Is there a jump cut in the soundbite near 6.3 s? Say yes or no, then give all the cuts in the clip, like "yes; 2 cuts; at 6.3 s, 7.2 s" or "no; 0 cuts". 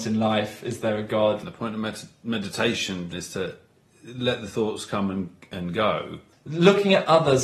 yes; 3 cuts; at 1.4 s, 3.1 s, 6.3 s